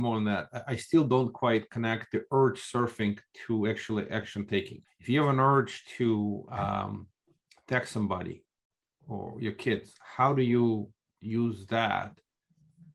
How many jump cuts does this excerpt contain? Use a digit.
1